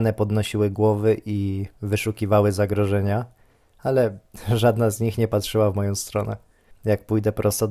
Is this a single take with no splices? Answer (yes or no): no